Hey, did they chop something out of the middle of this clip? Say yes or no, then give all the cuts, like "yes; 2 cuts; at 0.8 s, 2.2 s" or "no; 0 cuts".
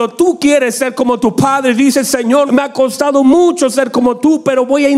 yes; 1 cut; at 2.5 s